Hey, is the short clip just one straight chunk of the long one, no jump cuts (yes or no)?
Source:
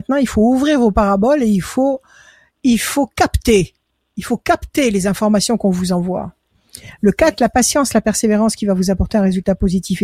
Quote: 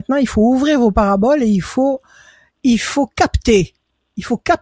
yes